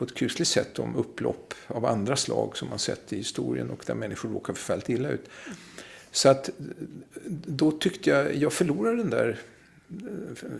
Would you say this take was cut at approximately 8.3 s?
yes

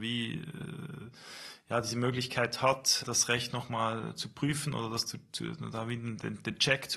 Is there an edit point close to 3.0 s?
yes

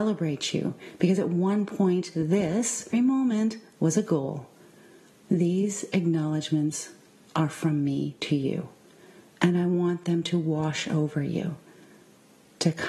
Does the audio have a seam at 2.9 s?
yes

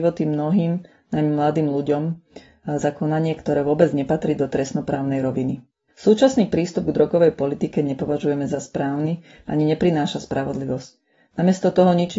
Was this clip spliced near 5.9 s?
yes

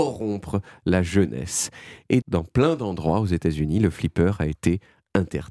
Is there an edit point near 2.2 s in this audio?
yes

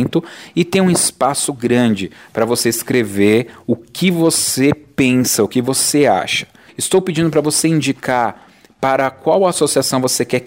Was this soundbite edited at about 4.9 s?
no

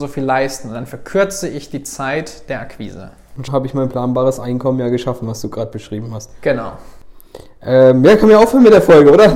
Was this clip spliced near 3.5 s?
yes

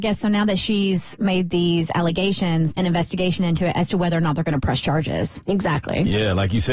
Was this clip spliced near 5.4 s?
no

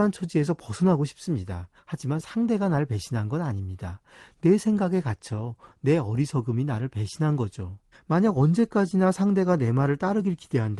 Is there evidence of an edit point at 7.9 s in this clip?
yes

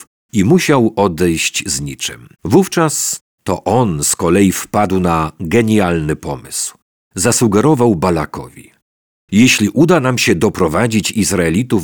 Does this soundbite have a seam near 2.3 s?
yes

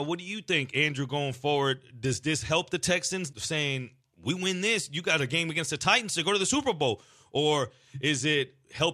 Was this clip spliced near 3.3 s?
yes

